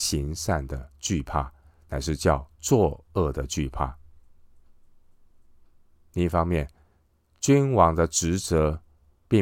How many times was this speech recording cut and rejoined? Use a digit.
0